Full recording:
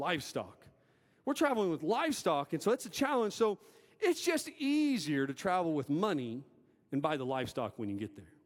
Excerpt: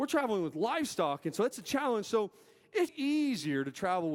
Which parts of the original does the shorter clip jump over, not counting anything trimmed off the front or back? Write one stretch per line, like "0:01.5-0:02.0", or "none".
0:04.2-0:04.5